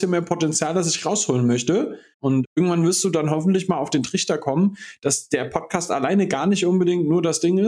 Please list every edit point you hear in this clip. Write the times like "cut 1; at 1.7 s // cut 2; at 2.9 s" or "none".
cut 1; at 2.1 s